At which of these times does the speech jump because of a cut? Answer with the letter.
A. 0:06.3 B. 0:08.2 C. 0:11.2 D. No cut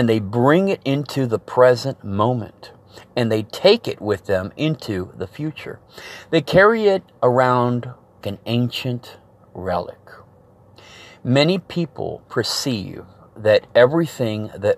B